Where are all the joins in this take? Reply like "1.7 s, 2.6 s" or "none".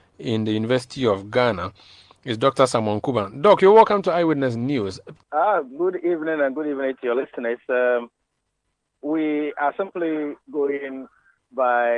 5.2 s